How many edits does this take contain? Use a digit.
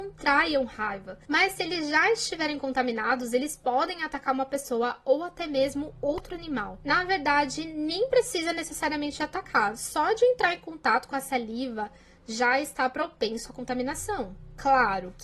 0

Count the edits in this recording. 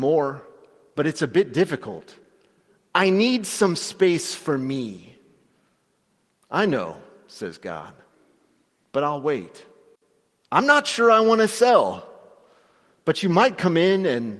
1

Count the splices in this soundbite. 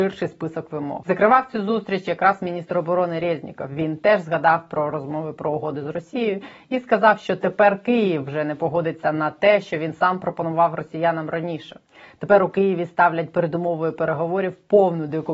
1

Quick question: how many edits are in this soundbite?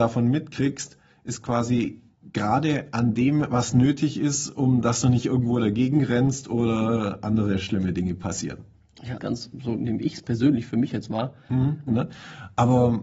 2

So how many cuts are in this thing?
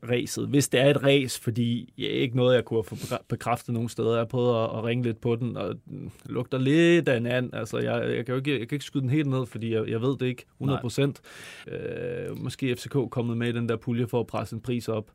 1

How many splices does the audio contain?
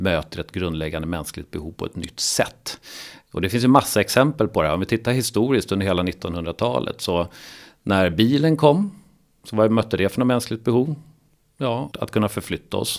1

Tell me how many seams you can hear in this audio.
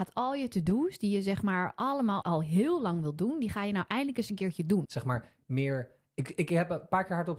2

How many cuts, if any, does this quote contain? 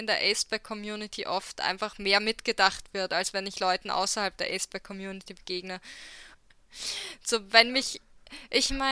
1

